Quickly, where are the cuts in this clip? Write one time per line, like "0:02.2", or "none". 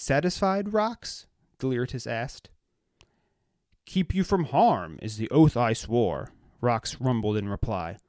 none